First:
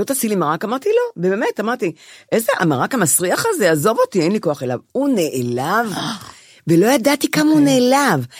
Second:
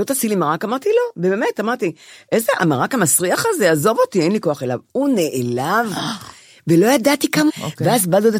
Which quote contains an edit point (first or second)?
second